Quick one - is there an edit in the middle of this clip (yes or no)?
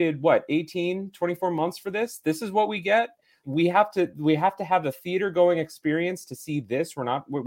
yes